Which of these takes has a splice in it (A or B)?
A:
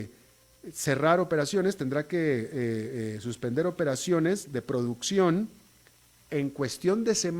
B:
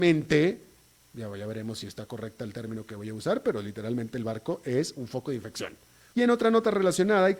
B